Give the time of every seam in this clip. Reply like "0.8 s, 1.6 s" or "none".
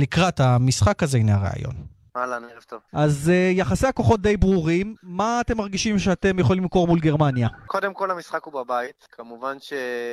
2.1 s